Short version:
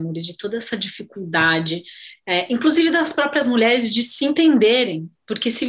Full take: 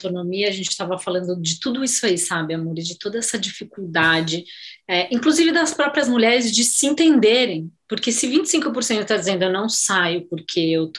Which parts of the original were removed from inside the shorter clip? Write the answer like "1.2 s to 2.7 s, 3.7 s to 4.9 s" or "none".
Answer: none